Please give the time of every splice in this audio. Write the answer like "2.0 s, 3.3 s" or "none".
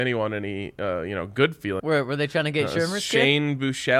1.8 s